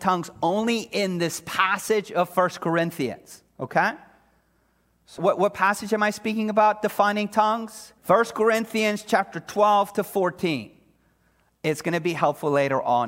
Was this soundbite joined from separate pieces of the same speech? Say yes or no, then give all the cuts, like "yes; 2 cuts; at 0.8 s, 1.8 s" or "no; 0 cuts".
yes; 2 cuts; at 5.2 s, 8.0 s